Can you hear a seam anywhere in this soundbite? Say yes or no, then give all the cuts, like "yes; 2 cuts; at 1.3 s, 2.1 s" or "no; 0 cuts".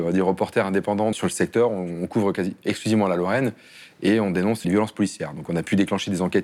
yes; 2 cuts; at 1.1 s, 4.6 s